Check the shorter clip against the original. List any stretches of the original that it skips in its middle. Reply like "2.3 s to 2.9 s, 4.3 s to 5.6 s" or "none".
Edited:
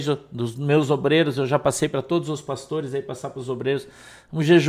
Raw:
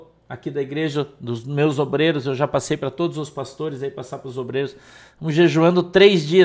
none